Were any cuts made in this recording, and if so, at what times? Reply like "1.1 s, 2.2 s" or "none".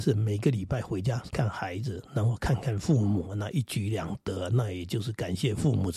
1.3 s